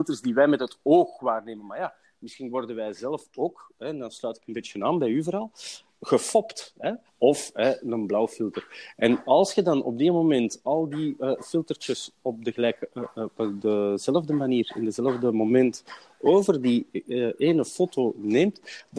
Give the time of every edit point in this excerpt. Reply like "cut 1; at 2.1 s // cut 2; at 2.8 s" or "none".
cut 1; at 7.1 s